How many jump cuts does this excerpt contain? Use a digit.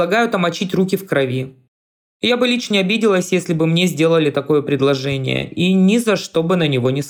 1